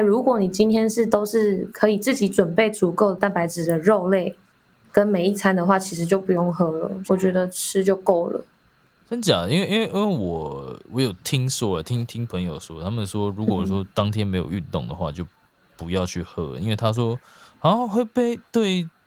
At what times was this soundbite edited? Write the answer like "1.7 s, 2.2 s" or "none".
7.1 s